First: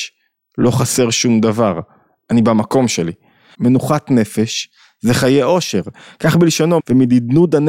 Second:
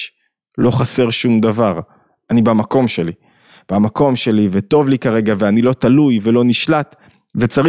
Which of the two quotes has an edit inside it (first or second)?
first